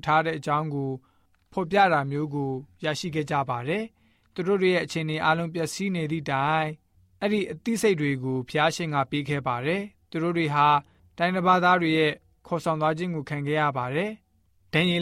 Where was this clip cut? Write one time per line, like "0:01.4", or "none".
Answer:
none